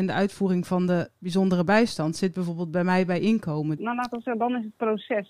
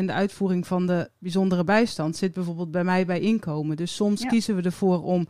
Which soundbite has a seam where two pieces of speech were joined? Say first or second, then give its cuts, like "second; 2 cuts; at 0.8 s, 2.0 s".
first; 1 cut; at 3.8 s